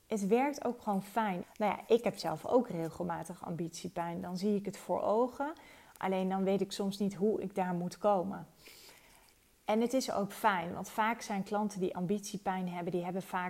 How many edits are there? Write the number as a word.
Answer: one